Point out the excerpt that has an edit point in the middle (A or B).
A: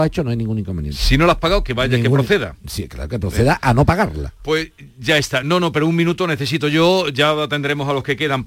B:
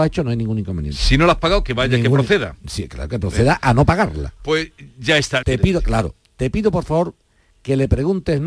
B